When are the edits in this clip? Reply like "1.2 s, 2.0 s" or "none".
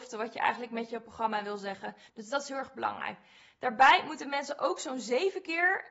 2.1 s